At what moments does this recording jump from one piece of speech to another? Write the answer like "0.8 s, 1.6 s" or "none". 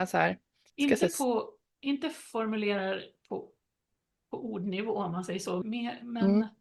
5.6 s